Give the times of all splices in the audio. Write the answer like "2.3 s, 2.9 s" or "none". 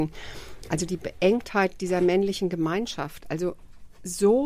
none